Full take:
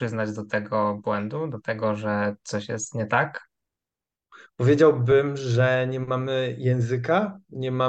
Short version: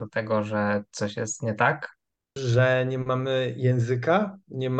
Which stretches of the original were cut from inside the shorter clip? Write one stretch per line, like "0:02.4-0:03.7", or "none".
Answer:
0:03.9-0:05.4